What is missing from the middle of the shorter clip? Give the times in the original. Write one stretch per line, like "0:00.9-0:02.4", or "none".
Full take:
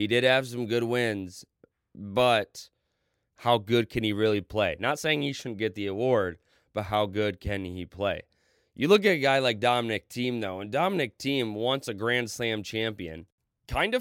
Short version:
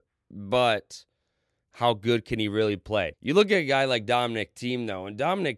0:04.8-0:08.7